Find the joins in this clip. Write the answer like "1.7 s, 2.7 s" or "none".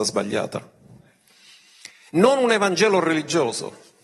2.1 s